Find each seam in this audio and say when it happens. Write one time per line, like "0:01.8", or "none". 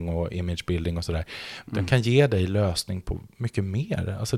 0:01.7